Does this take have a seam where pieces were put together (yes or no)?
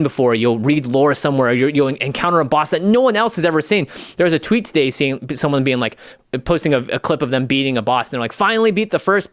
no